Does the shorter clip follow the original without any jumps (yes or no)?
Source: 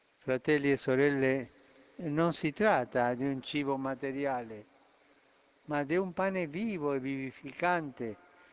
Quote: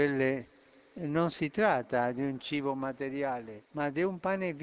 no